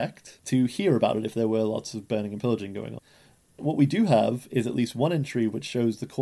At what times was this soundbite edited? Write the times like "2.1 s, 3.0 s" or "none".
none